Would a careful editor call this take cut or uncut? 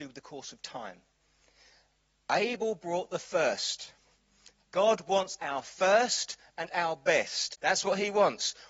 uncut